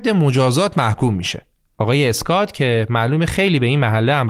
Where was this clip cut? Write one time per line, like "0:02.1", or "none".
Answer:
0:01.7